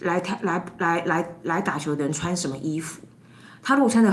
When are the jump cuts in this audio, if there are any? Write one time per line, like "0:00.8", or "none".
none